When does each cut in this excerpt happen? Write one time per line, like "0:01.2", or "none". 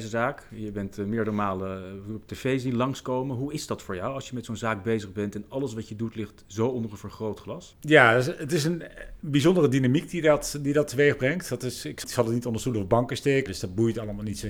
0:12.0
0:13.5

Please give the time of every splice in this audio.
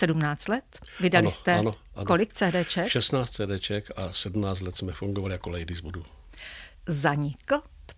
0:06.7

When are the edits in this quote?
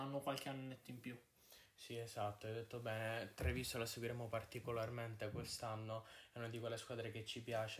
none

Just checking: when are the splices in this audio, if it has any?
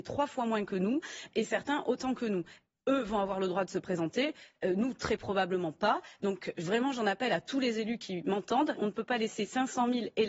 0:08.8

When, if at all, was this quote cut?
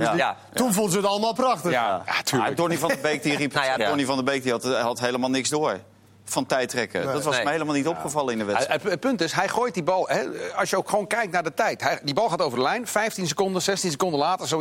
0:03.8

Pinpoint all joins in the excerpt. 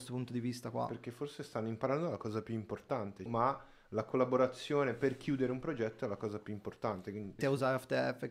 0:03.3
0:07.4

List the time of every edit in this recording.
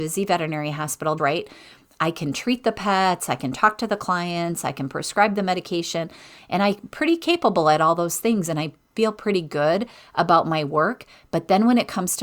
0:01.2

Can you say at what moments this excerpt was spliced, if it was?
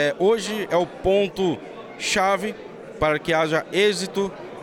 none

